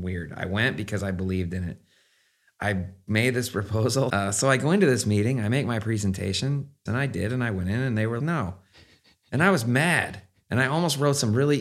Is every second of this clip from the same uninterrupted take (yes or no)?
no